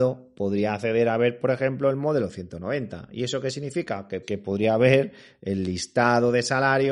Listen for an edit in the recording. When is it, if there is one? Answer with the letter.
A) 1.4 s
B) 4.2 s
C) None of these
B